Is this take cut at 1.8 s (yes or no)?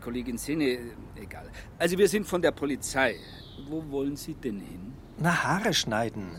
no